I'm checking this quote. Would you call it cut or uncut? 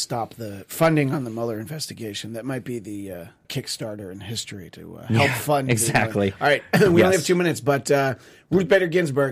cut